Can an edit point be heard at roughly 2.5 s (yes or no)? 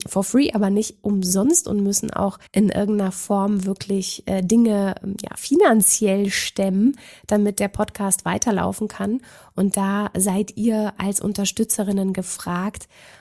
yes